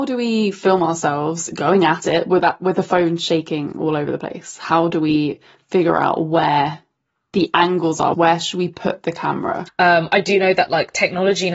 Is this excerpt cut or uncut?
cut